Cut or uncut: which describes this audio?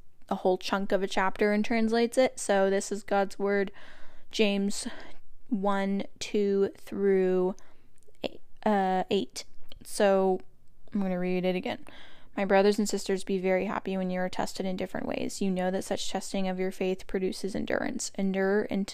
uncut